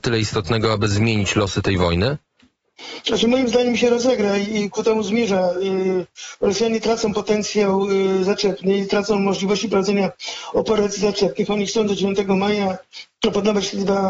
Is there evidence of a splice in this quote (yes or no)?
no